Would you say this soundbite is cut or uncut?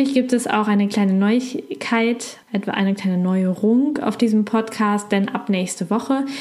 cut